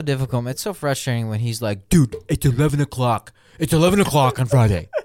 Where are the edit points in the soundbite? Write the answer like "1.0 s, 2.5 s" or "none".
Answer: none